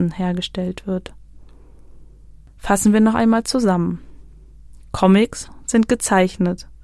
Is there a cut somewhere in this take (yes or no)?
no